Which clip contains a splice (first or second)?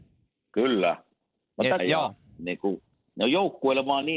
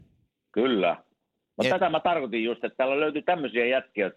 first